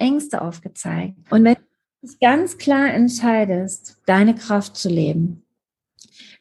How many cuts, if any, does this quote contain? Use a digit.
2